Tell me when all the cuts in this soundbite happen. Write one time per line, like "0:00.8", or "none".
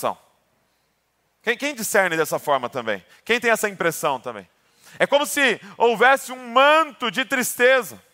none